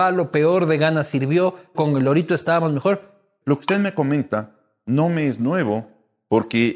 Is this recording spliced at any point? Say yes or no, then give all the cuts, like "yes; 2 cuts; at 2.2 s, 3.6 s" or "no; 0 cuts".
yes; 2 cuts; at 1.7 s, 3.4 s